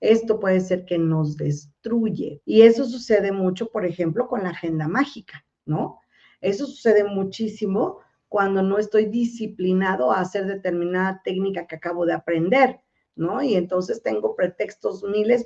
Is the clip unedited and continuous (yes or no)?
no